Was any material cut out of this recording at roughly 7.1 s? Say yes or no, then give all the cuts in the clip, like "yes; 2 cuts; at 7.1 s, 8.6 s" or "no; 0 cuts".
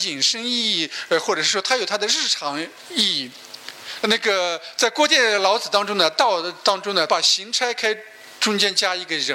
yes; 2 cuts; at 4.0 s, 7.1 s